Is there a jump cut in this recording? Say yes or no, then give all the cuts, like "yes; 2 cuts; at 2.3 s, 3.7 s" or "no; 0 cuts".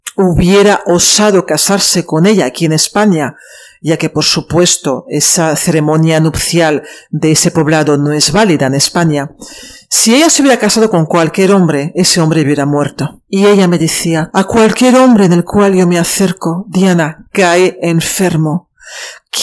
yes; 2 cuts; at 13.3 s, 14.3 s